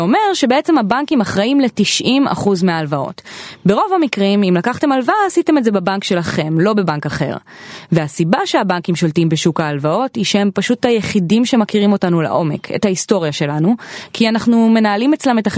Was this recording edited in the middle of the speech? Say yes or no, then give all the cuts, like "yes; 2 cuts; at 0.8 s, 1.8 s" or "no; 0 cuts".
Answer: no; 0 cuts